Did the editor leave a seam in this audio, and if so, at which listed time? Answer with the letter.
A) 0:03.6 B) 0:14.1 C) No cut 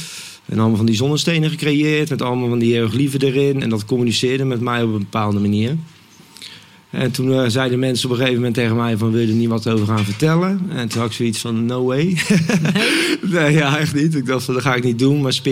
C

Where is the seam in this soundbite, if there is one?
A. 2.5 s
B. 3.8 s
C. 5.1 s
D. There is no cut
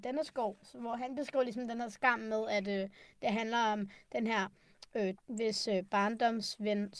C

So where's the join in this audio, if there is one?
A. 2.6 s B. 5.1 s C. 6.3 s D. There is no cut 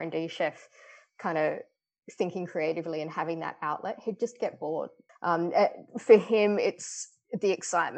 B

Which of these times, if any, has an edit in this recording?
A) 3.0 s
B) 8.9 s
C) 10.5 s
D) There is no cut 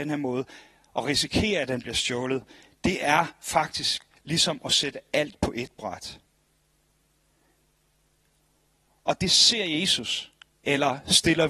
C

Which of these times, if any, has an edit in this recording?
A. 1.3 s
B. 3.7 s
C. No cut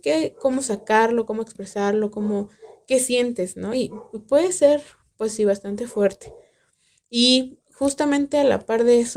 C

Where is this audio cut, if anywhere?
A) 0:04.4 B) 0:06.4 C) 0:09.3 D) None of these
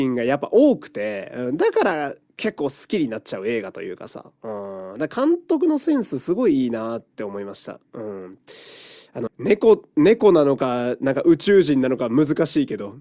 C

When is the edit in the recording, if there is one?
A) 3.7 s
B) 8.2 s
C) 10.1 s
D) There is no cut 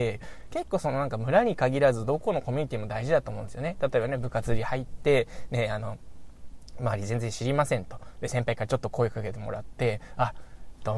D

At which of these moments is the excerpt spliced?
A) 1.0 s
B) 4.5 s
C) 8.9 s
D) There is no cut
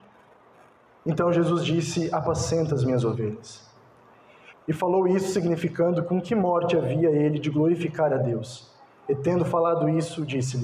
B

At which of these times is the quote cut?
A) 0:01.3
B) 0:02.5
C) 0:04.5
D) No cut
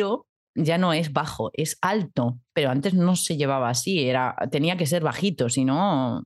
B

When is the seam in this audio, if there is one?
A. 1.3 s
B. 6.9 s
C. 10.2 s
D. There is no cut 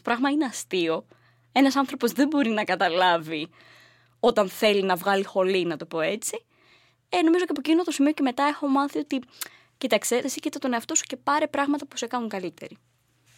C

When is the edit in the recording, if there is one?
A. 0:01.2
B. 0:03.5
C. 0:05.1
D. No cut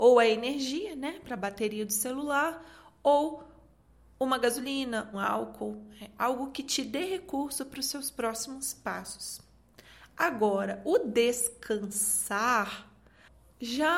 C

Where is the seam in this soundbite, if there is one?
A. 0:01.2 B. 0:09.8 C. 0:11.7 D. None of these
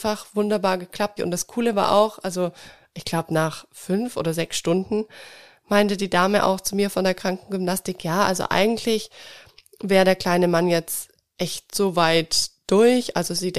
A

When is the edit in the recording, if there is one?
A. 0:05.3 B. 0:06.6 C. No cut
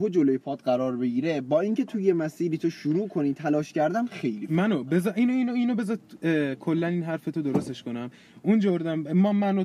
C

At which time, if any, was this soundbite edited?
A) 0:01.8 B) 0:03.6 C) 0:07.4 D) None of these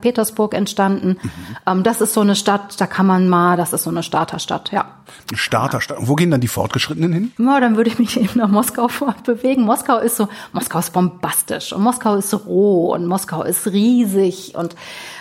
C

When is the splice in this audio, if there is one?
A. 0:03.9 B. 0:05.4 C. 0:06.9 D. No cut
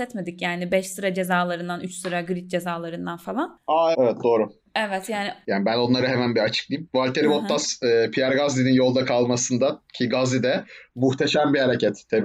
A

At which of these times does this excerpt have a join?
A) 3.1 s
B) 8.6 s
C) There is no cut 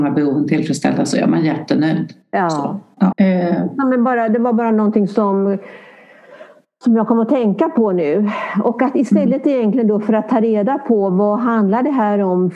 A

